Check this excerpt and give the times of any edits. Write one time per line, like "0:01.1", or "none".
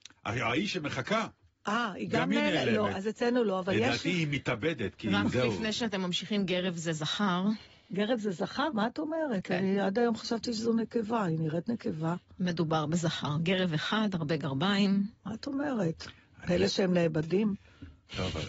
0:08.7
0:15.2